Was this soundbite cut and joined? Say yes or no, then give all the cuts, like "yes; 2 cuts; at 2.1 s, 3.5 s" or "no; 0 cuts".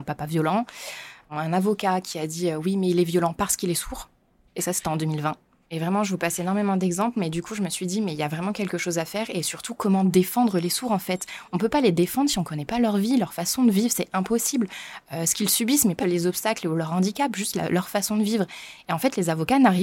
yes; 2 cuts; at 5.6 s, 16.0 s